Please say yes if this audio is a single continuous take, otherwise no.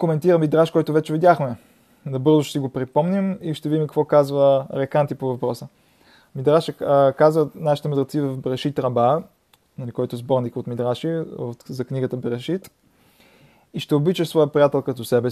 yes